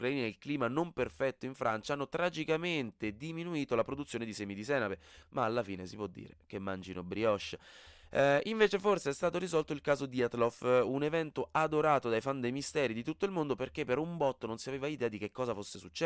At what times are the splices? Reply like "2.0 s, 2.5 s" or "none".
5.2 s